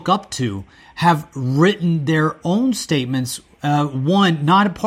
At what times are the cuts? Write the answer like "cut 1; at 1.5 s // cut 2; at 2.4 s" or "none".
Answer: none